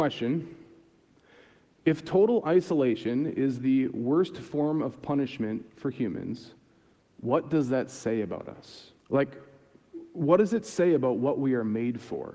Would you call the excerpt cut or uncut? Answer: cut